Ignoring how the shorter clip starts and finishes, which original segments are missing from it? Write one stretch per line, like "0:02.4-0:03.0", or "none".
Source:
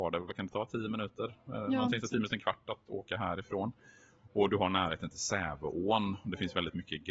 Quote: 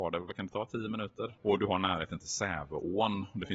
0:01.4-0:04.3